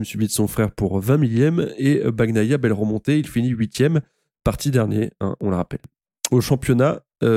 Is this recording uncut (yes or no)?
yes